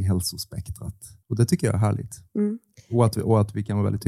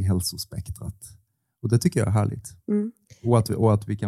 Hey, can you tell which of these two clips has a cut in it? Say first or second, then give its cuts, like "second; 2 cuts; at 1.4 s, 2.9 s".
first; 1 cut; at 1.2 s